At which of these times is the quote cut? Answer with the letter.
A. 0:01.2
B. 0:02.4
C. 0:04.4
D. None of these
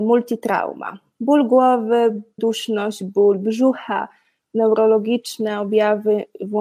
B